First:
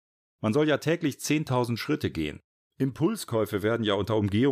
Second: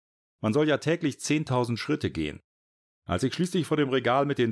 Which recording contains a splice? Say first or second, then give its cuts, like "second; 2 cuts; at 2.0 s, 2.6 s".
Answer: first; 1 cut; at 2.7 s